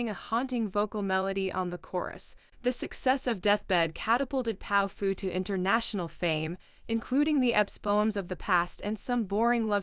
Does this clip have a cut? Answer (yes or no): yes